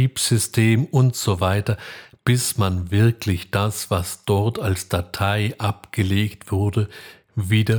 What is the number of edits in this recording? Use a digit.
0